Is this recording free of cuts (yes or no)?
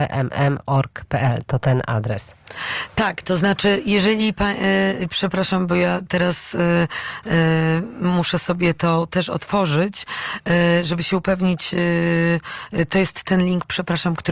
yes